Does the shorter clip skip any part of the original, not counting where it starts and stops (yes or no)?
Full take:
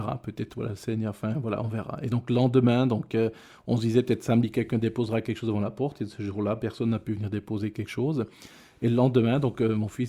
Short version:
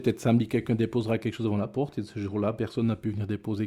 no